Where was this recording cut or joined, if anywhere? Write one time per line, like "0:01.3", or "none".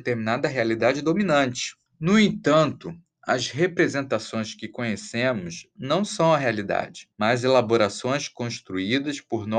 0:01.9
0:07.1